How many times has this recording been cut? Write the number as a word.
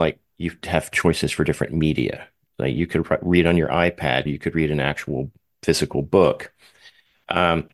one